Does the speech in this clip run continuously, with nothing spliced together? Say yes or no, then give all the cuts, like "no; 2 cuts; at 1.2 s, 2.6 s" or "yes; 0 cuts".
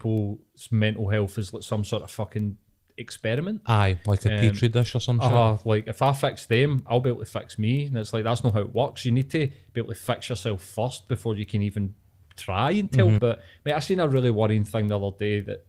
no; 1 cut; at 13.2 s